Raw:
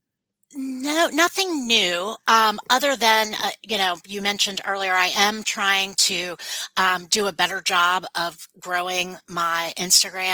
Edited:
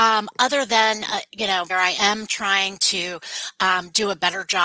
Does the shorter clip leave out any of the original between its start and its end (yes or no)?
yes